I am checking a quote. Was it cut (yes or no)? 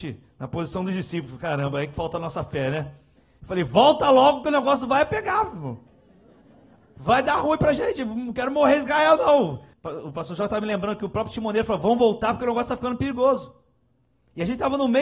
yes